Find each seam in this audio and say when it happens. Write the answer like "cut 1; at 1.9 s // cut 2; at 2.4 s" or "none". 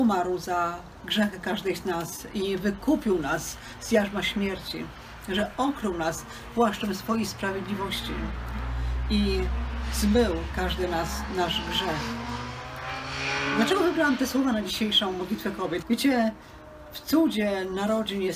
cut 1; at 15.8 s